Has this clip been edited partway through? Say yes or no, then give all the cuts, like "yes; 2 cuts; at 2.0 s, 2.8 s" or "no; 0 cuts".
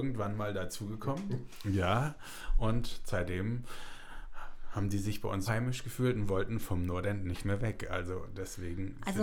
yes; 1 cut; at 5.5 s